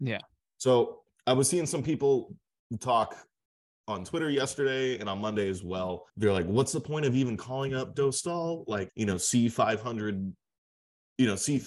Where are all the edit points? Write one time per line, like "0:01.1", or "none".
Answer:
0:06.1
0:08.9